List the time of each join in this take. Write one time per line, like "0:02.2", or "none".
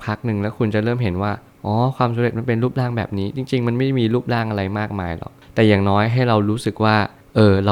none